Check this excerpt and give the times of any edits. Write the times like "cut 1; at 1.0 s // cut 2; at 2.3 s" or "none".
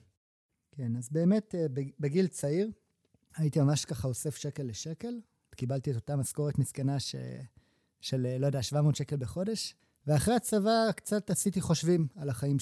cut 1; at 5.5 s